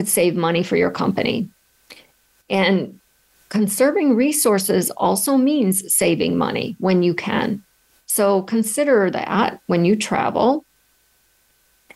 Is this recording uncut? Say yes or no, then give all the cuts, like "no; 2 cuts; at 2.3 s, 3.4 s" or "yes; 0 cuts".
yes; 0 cuts